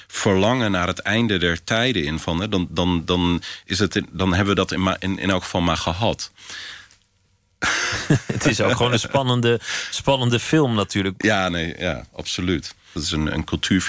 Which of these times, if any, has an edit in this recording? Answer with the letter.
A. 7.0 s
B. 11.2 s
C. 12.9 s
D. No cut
C